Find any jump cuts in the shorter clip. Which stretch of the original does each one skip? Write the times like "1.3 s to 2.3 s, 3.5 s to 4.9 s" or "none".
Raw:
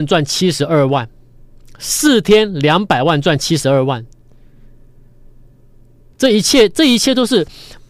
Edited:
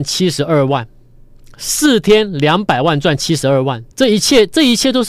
4.1 s to 6.1 s